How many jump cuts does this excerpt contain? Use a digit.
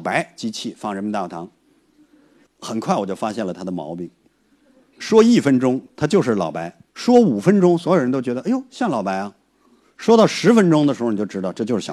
2